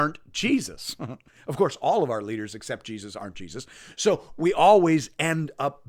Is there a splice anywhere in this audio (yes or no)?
no